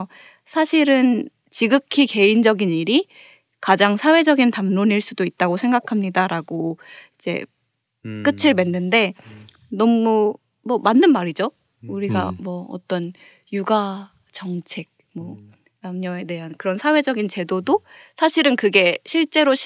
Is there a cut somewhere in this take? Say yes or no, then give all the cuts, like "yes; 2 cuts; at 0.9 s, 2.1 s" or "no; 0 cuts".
no; 0 cuts